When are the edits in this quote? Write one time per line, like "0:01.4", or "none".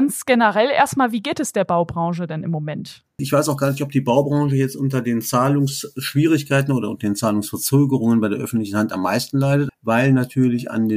0:03.2
0:09.7